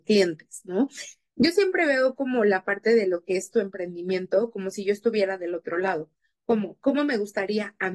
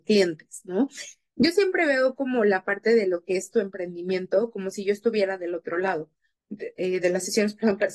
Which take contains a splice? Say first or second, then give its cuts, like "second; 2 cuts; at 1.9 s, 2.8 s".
second; 1 cut; at 6.4 s